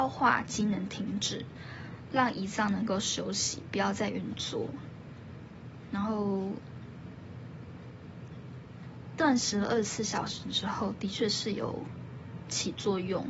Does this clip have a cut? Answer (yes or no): no